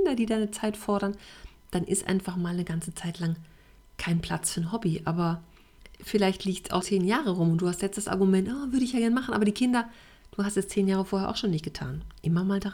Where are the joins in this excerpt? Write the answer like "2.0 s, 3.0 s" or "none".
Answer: 6.8 s